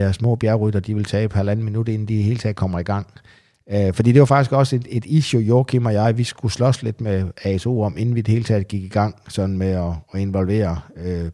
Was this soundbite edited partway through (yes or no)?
no